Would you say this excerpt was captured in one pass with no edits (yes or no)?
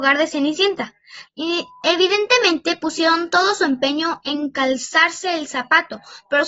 no